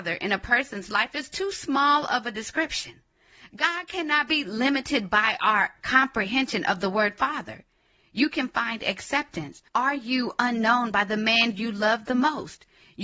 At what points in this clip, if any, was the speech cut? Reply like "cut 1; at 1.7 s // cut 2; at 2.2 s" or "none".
cut 1; at 8.0 s